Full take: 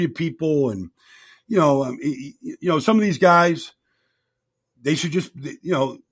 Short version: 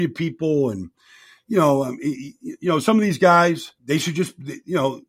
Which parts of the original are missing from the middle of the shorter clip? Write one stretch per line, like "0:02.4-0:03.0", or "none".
0:03.8-0:04.7